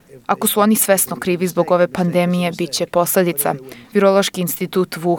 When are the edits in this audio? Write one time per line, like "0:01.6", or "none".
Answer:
0:03.8